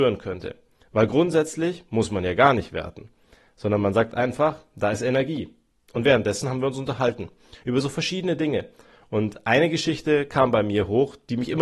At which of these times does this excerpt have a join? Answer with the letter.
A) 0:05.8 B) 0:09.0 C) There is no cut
A